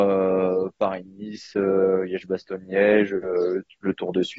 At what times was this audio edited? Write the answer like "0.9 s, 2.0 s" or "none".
none